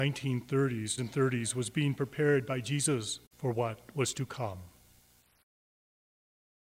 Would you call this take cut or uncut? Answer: cut